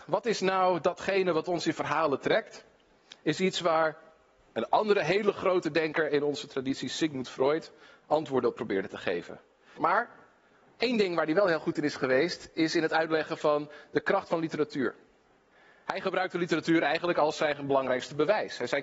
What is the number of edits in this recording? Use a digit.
1